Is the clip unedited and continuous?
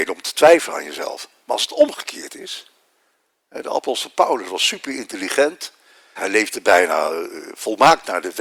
no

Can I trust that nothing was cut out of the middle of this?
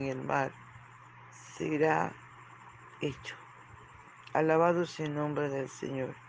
yes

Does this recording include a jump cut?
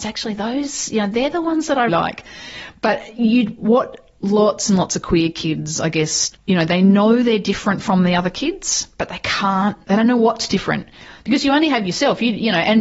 yes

